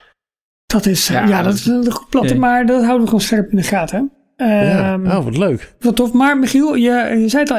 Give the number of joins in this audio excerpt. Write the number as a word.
one